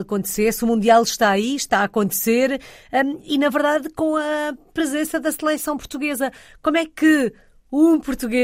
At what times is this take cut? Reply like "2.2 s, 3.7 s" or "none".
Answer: none